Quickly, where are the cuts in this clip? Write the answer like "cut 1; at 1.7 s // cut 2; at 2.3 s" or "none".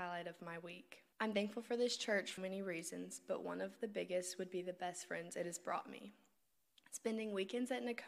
cut 1; at 1.1 s // cut 2; at 2.4 s